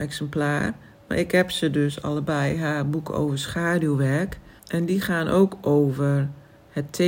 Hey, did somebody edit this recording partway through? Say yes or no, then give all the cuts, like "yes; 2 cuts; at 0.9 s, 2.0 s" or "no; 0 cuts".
yes; 1 cut; at 4.6 s